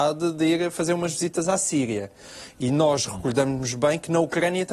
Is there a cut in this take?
no; 0 cuts

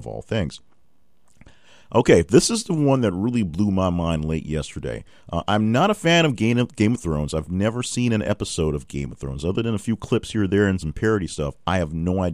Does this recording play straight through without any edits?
yes; 0 cuts

